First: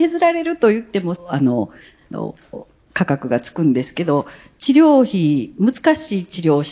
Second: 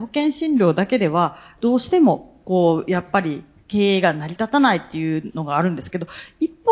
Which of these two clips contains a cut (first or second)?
first